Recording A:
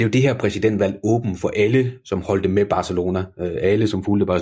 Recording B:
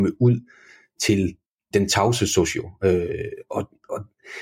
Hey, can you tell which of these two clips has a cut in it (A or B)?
B